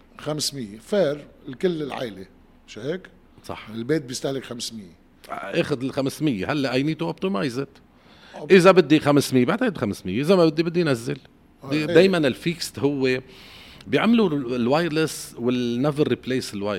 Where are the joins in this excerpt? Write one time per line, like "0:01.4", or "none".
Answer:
0:11.9